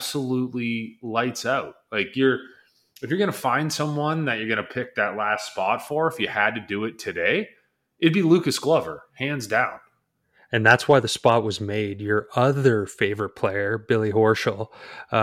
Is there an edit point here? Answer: no; 0 cuts

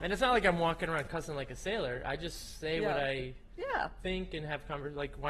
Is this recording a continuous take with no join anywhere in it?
yes; 0 cuts

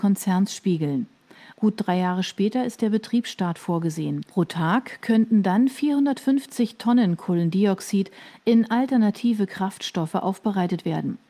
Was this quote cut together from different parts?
yes; 2 cuts; at 1.5 s, 4.3 s

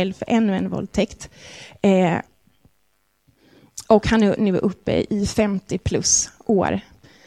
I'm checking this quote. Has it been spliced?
no; 0 cuts

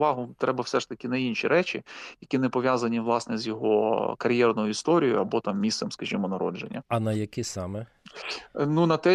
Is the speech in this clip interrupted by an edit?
no; 0 cuts

